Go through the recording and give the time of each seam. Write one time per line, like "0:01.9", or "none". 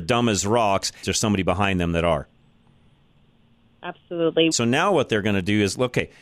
0:01.0
0:04.5